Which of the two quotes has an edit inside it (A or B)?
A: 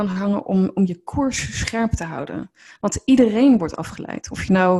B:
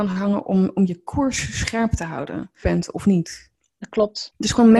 B